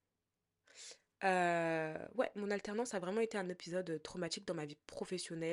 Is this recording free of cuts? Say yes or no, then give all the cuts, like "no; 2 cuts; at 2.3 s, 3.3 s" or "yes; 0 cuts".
yes; 0 cuts